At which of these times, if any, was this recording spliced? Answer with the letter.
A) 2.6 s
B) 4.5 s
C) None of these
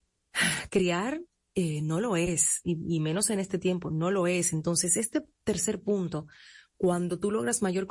C